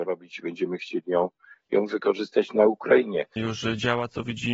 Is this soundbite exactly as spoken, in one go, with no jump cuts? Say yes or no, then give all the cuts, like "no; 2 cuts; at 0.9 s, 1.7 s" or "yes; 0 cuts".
no; 1 cut; at 3.4 s